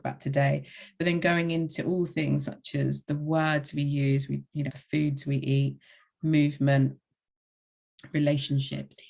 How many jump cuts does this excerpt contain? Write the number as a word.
one